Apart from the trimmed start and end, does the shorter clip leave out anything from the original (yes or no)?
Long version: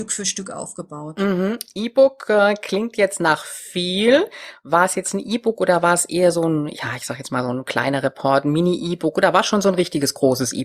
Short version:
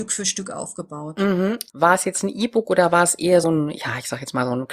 yes